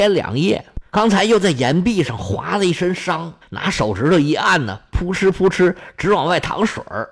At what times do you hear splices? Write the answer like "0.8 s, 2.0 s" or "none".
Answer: 3.4 s

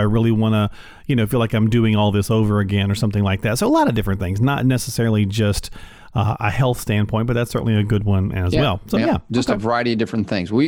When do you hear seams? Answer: none

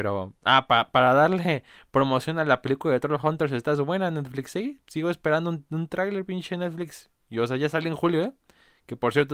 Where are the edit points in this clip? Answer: none

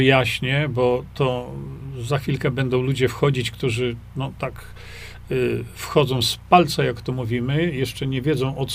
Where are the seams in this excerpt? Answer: none

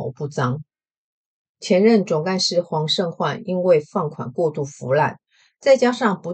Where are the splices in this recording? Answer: none

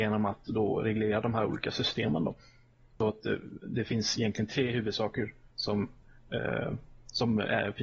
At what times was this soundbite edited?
none

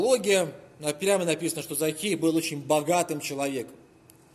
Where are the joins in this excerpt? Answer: none

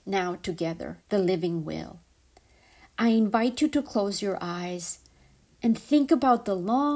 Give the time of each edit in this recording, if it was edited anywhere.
1.0 s

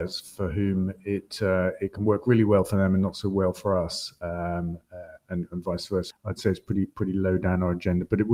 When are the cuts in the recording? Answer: 6.1 s

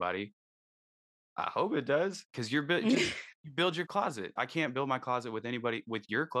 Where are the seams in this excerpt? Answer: 4.4 s

